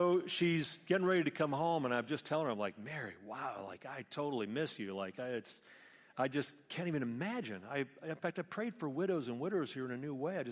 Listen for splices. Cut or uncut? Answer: uncut